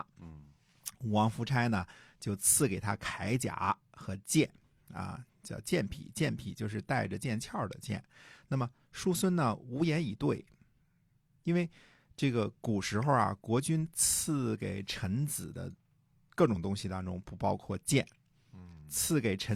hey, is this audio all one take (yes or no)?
yes